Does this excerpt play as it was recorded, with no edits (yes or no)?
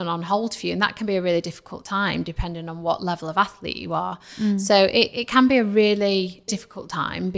no